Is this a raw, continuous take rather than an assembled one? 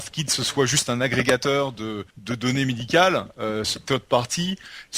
no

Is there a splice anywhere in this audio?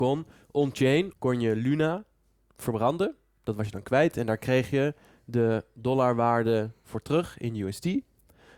yes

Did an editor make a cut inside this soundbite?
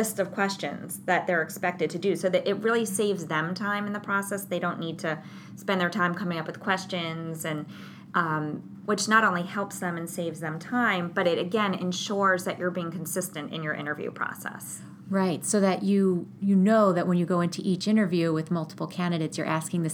yes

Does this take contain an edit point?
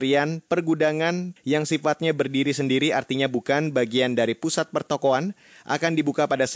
yes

